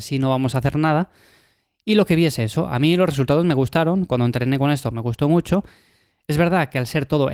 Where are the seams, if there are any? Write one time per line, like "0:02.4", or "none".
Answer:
none